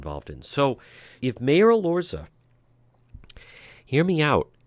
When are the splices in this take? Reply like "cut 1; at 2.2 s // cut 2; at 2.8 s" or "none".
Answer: cut 1; at 1.2 s